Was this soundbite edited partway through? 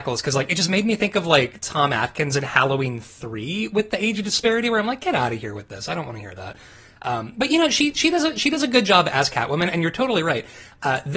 no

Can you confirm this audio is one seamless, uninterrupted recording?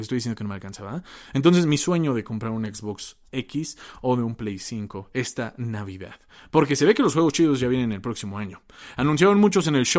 yes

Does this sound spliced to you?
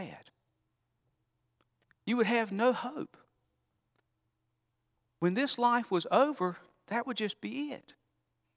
no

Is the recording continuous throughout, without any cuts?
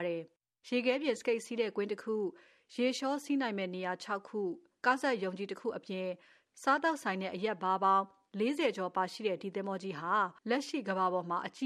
no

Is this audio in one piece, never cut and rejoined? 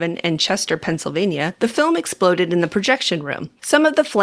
yes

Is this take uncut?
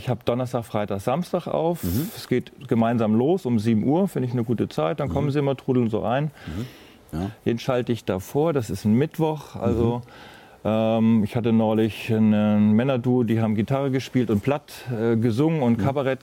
no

